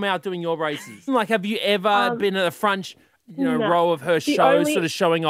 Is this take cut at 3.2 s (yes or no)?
yes